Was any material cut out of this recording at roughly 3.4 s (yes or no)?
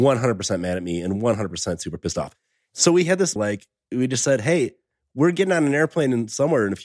yes